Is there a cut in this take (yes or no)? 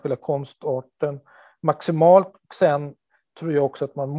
no